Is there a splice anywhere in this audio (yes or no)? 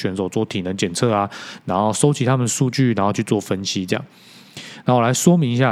no